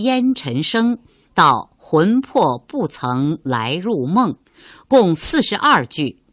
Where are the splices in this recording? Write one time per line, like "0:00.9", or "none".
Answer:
none